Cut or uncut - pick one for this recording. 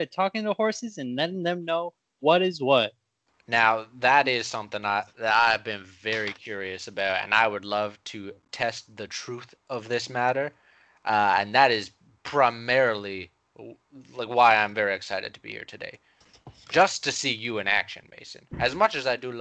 uncut